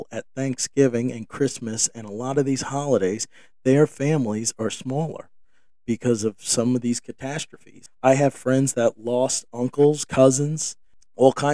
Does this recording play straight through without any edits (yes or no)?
yes